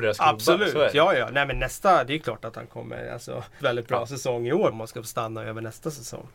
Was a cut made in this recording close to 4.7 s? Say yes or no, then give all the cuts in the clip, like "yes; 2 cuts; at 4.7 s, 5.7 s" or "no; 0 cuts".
yes; 2 cuts; at 3.6 s, 4.7 s